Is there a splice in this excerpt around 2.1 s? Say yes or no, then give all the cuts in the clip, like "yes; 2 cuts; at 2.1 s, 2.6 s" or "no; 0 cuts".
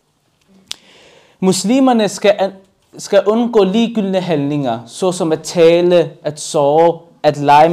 no; 0 cuts